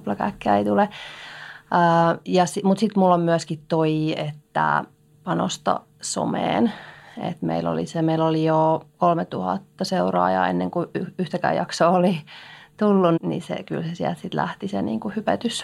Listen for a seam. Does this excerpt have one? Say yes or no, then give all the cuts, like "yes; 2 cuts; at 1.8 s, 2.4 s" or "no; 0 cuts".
yes; 1 cut; at 13.2 s